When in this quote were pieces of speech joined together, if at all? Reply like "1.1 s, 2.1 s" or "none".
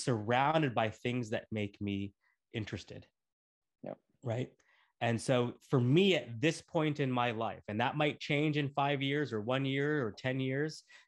none